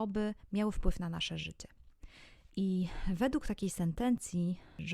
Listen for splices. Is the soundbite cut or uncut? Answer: cut